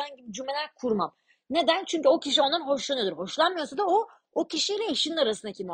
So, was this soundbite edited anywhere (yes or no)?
no